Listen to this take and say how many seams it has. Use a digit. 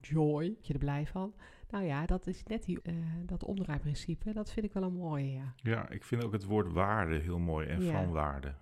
1